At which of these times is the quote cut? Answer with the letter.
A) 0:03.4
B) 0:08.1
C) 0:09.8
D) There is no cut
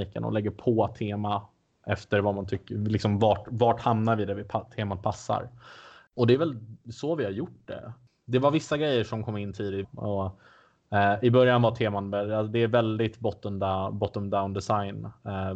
C